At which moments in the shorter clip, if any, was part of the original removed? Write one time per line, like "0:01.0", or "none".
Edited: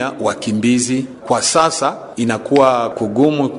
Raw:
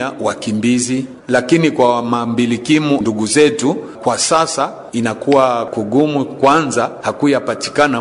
0:01.2